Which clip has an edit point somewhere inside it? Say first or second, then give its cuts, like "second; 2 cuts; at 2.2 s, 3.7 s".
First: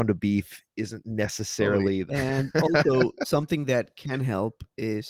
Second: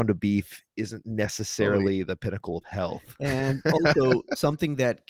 first; 1 cut; at 2.1 s